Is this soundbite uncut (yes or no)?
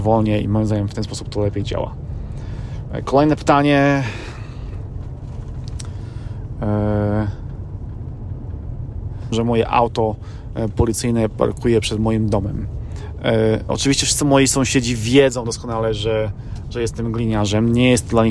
no